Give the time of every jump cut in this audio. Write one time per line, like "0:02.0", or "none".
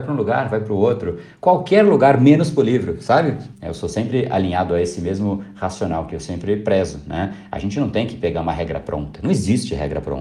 0:03.5